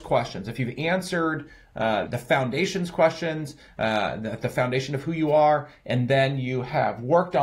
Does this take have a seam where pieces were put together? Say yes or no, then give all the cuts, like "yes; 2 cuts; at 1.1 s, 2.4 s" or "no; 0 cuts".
yes; 1 cut; at 2.1 s